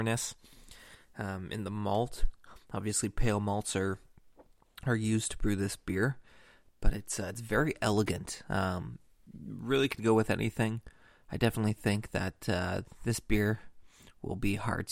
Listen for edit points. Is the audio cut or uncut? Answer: uncut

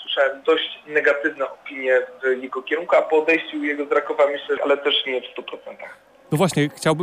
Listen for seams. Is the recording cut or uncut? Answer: cut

